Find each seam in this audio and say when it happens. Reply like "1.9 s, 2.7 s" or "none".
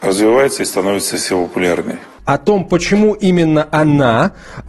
2.2 s